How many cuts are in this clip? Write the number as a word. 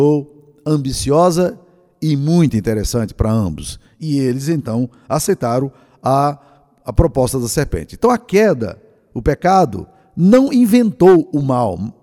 zero